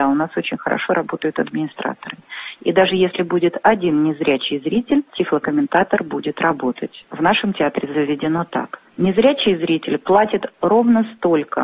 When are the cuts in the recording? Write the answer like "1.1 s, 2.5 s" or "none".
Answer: none